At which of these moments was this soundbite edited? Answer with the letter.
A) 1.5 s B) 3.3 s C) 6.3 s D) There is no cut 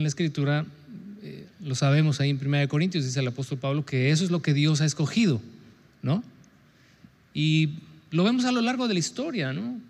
D